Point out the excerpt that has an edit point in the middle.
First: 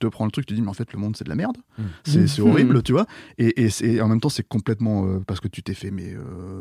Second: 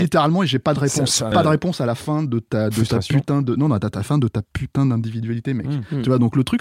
second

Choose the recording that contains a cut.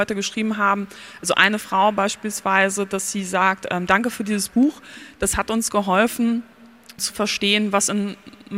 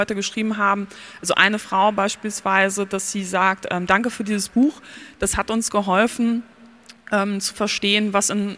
first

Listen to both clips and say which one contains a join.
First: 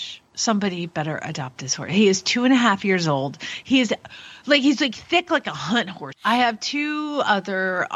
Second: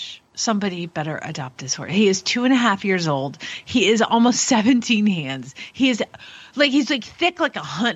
first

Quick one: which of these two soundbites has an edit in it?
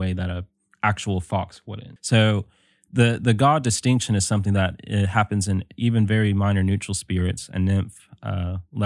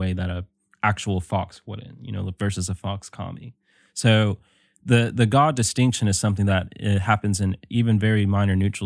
first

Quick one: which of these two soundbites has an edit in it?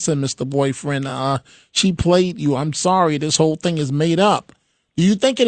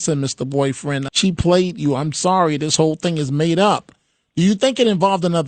second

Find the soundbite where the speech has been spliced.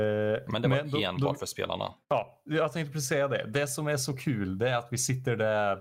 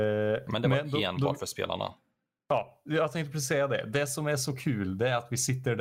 first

